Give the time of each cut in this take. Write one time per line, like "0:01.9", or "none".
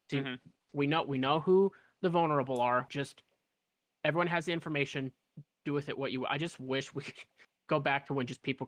0:02.9